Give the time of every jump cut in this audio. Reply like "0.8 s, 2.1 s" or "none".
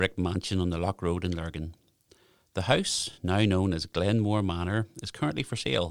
none